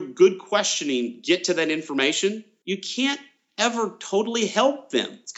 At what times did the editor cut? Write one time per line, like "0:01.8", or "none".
none